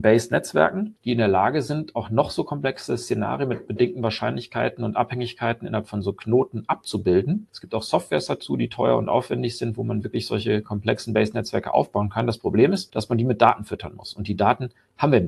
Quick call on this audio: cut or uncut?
uncut